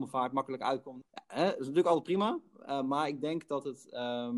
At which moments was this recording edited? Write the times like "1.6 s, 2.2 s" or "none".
1.0 s